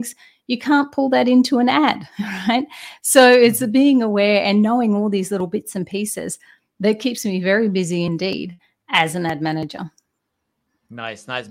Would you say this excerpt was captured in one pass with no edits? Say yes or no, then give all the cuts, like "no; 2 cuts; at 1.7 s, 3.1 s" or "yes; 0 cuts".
yes; 0 cuts